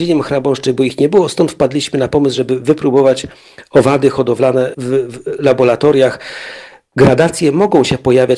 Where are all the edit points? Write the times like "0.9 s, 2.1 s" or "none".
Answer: 4.7 s